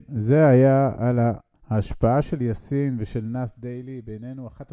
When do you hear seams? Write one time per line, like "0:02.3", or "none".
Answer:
0:01.5